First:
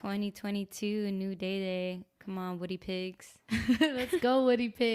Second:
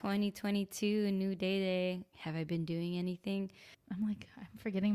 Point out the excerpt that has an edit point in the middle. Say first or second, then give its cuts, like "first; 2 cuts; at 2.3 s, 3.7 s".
second; 2 cuts; at 2.1 s, 3.7 s